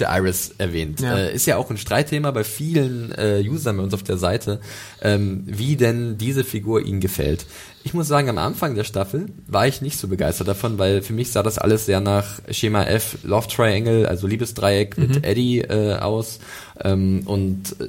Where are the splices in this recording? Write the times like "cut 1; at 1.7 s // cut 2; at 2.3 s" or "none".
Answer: cut 1; at 13.2 s